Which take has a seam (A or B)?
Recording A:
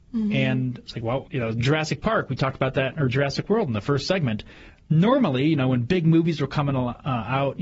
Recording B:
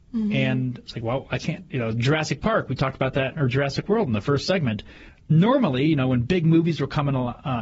A